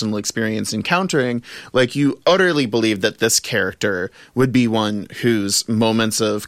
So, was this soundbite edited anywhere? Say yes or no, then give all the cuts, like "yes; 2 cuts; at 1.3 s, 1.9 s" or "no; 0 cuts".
no; 0 cuts